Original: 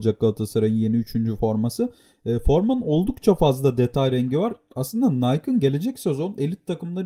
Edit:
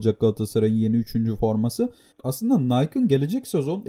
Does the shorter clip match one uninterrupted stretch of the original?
no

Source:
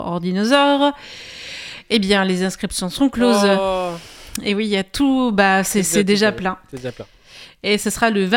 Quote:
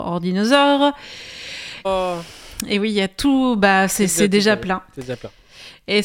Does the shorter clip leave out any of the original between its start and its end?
yes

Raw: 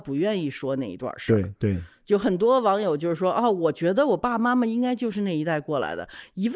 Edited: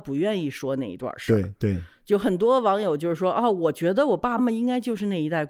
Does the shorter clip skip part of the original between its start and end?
yes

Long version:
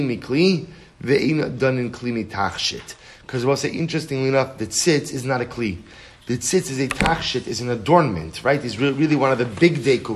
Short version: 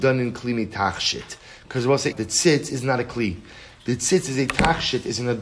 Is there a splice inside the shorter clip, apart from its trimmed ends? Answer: yes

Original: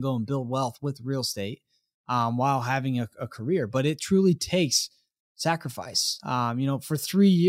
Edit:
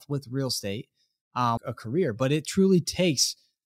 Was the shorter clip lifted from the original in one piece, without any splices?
no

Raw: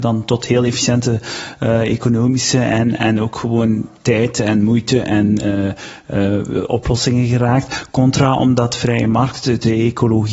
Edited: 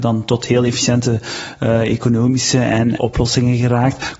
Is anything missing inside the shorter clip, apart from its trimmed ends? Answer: yes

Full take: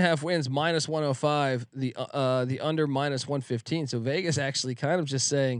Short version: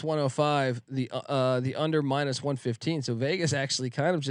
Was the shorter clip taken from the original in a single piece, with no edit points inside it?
yes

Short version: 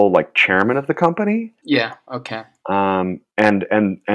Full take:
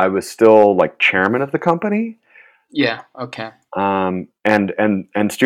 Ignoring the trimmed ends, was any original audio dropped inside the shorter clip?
yes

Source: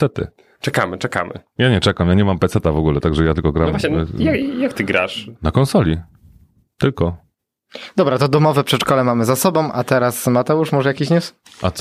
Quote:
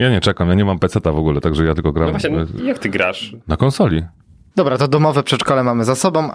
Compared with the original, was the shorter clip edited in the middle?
yes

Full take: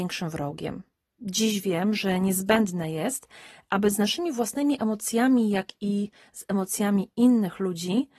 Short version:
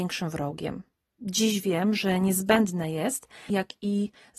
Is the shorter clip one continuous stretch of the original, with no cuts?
no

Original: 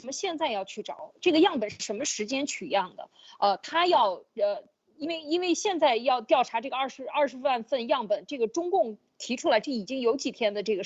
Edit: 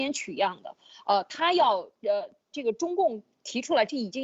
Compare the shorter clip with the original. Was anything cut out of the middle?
yes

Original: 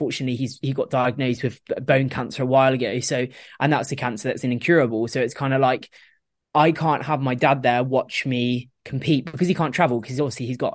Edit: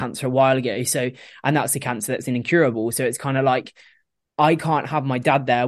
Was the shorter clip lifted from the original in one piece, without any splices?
yes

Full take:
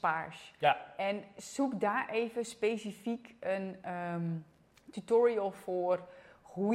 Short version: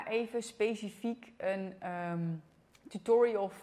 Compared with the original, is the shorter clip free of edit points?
yes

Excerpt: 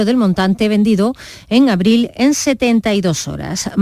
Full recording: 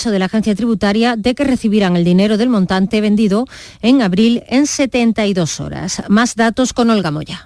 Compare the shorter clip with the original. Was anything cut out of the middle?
no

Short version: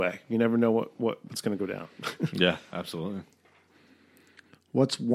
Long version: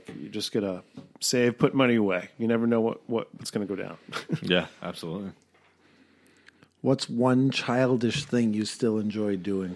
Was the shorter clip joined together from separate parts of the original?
no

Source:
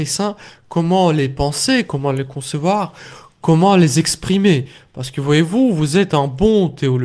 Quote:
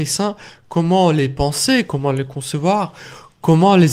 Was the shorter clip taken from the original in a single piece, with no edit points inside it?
yes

